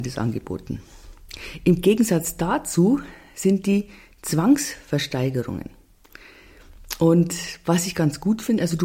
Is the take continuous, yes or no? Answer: yes